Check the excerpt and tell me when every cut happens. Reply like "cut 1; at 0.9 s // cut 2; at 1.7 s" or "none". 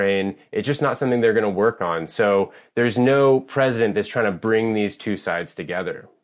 none